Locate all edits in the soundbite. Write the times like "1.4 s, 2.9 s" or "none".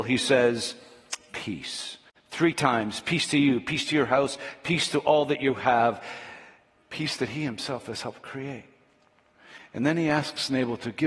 none

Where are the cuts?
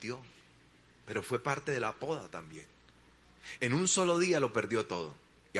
3.6 s

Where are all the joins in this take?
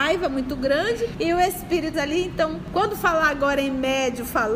1.9 s

